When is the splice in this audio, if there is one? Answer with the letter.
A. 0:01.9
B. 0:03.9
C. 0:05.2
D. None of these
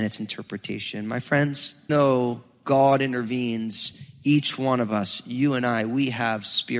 A